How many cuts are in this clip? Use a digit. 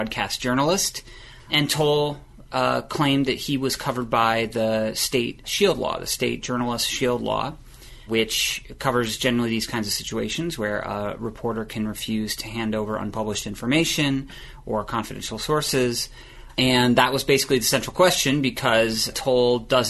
1